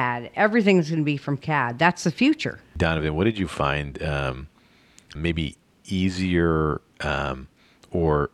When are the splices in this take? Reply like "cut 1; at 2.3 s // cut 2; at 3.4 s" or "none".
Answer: cut 1; at 5.2 s